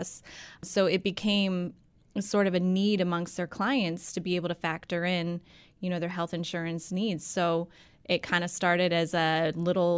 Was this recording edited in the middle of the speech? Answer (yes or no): no